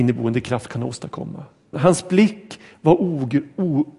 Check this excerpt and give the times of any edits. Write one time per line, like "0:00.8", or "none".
0:01.7